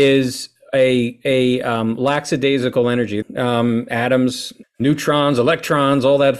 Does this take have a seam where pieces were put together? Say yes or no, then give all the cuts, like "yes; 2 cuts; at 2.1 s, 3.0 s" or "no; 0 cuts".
yes; 2 cuts; at 3.2 s, 4.6 s